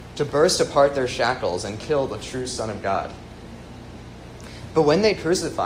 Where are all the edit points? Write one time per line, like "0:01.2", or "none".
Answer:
0:04.7